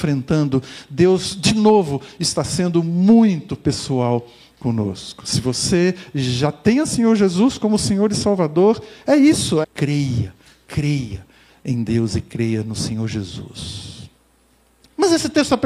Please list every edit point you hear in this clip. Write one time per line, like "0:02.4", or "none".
0:09.6
0:11.5